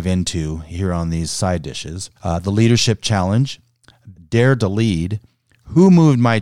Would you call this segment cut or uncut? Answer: cut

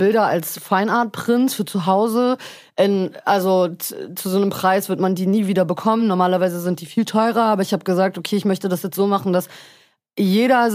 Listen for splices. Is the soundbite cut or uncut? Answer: uncut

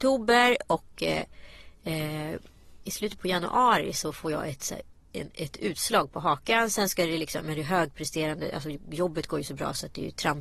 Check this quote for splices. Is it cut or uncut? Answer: uncut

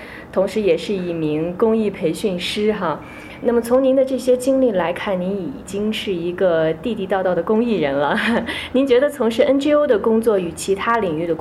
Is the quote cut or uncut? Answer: uncut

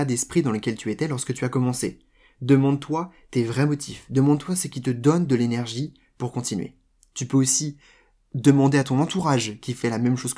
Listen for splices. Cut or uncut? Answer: uncut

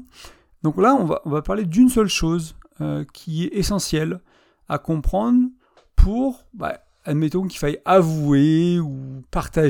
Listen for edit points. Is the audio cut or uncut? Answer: uncut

